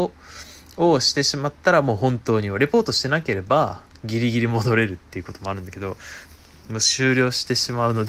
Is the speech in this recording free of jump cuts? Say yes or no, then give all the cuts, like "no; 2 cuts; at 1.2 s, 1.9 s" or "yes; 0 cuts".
yes; 0 cuts